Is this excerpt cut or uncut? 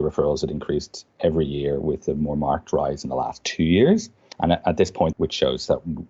cut